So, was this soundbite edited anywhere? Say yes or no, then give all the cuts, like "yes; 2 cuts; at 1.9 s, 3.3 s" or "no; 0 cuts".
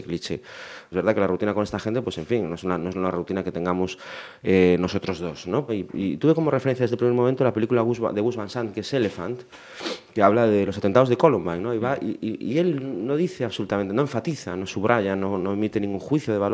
yes; 2 cuts; at 0.9 s, 5.7 s